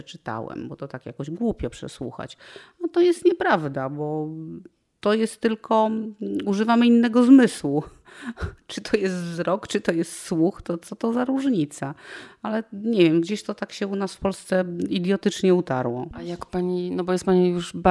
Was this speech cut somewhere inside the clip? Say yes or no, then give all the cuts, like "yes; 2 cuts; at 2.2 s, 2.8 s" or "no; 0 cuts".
no; 0 cuts